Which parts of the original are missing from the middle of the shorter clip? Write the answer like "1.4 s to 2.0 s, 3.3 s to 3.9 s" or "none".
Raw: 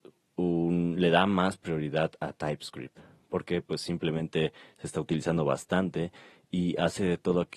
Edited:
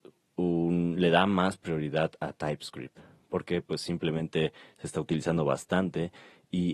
none

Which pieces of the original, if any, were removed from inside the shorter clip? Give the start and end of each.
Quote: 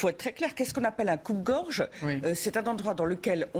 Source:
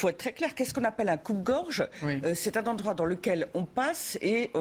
none

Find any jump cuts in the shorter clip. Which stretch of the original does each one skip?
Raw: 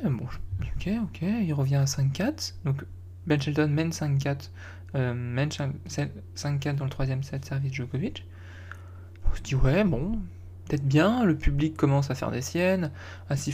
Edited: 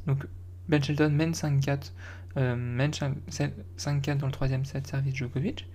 none

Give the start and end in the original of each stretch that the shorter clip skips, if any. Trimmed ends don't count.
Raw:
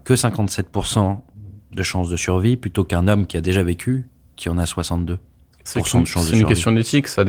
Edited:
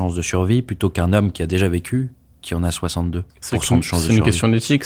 5.2 s to 5.5 s

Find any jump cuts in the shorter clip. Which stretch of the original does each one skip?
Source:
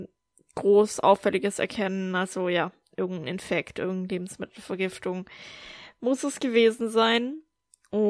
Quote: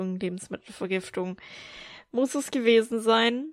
none

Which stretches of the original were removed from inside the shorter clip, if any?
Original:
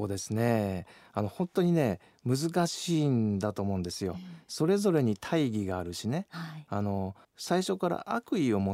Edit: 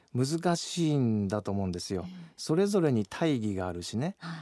none

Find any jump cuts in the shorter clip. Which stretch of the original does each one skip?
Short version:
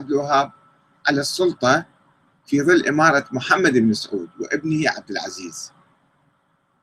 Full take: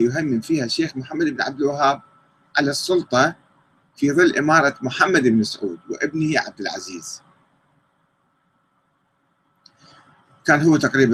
none

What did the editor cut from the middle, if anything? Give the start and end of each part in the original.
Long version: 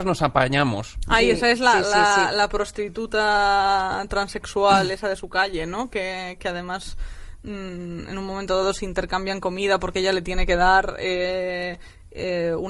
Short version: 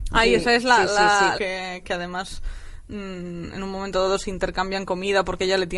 2.3 s to 5.9 s

